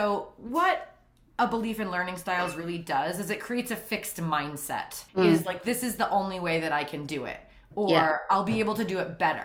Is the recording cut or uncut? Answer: cut